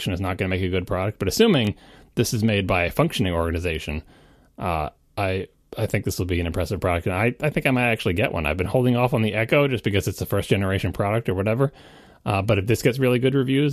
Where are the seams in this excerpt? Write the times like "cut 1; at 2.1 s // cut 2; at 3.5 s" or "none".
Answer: none